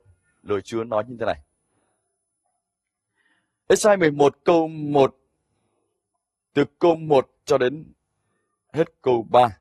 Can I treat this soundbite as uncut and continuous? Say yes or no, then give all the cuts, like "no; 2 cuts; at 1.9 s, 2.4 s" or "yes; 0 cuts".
yes; 0 cuts